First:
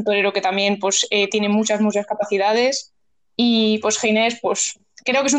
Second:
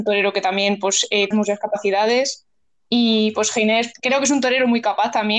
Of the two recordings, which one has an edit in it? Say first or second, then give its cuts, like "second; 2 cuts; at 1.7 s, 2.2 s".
second; 2 cuts; at 1.3 s, 3.9 s